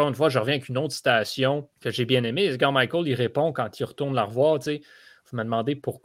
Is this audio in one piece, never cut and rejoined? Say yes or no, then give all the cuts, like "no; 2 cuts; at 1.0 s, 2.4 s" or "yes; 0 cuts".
no; 1 cut; at 1.7 s